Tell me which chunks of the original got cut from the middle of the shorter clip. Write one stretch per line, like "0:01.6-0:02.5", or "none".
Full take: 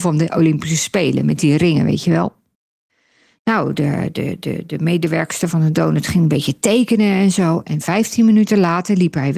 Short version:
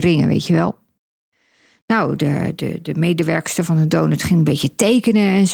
0:04.1-0:04.4